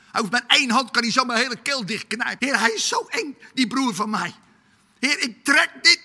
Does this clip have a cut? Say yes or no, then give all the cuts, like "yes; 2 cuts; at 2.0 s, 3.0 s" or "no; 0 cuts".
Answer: yes; 1 cut; at 2.4 s